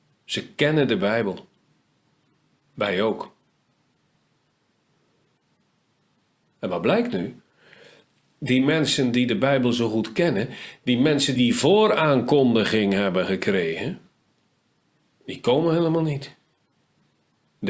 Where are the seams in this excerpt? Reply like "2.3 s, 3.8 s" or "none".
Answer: 11.4 s